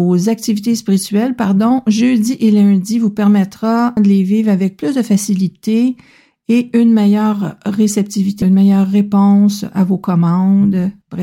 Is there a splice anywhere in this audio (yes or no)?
yes